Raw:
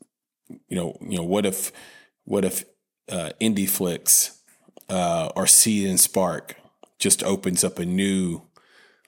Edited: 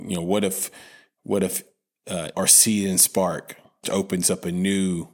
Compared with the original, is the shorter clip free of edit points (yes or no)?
no